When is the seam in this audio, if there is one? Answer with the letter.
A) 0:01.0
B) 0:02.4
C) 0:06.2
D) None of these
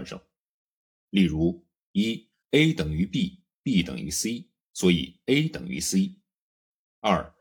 A